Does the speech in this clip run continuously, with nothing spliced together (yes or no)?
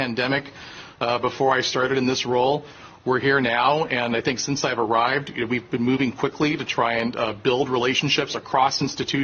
yes